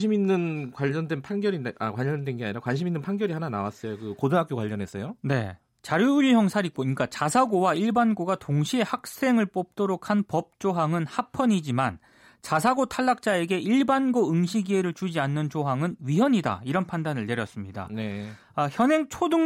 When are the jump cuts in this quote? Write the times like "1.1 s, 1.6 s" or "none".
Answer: none